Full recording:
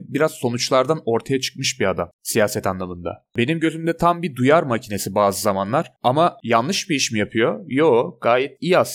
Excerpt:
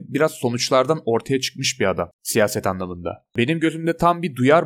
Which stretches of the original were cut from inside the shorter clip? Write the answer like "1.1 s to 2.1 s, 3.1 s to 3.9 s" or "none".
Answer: none